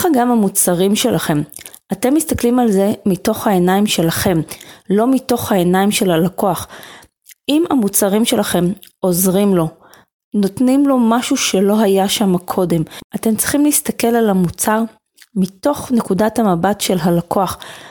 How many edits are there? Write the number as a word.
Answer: zero